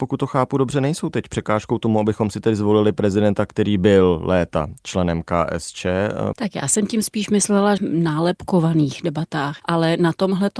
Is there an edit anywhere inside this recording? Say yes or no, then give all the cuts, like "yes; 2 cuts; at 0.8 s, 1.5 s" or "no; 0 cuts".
yes; 2 cuts; at 6.3 s, 7.8 s